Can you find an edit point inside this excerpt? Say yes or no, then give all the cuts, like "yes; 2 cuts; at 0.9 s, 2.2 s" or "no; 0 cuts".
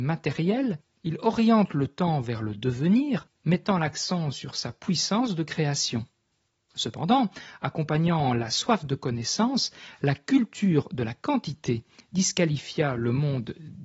no; 0 cuts